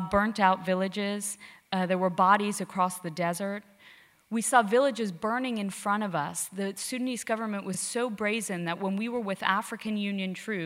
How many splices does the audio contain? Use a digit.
0